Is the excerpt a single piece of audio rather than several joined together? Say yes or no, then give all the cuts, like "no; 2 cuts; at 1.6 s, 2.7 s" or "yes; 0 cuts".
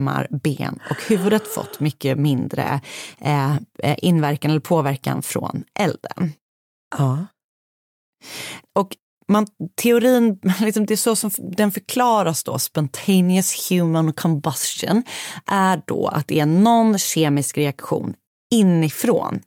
yes; 0 cuts